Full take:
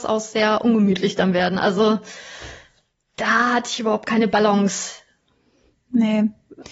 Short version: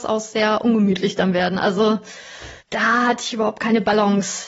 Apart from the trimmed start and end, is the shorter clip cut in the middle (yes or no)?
yes